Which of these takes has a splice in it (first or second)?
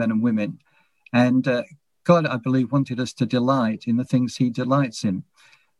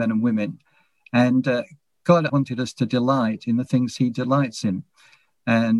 second